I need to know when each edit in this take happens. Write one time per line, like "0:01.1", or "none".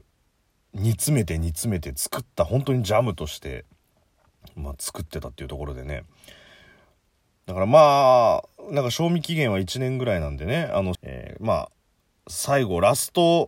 0:10.9

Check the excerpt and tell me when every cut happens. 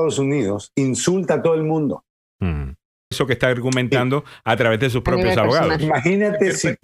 0:03.1

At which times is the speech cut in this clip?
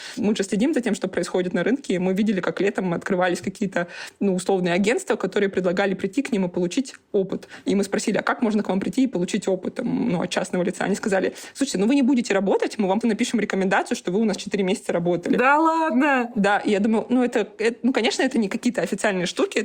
0:13.0

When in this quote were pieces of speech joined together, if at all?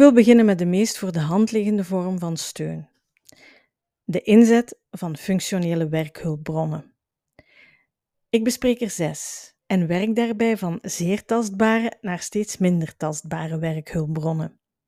0:08.1
0:09.6

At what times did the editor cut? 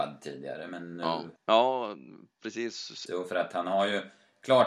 0:01.4
0:03.1

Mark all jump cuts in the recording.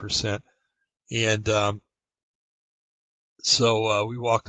none

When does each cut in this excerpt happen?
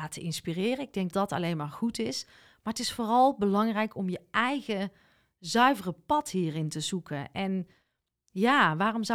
0:01.1

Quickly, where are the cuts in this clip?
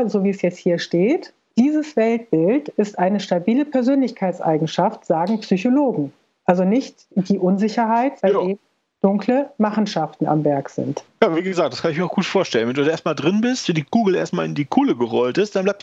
0:08.2

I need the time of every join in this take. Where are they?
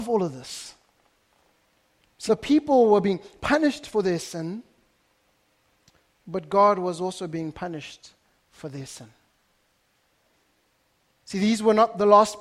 0:02.3

